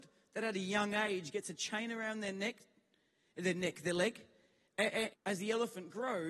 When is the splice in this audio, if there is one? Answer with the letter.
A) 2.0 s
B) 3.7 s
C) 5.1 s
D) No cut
C